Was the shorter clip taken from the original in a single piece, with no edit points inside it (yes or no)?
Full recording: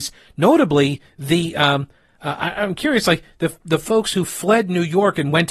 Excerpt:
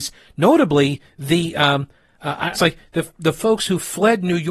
no